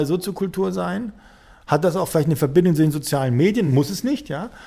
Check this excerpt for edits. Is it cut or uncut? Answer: uncut